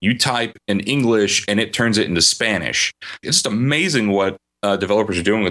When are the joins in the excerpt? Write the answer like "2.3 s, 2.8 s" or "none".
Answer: 3.2 s